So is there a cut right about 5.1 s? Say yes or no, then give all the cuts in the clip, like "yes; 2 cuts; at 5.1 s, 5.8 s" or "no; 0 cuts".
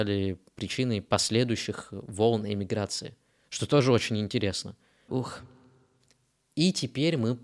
yes; 1 cut; at 5.1 s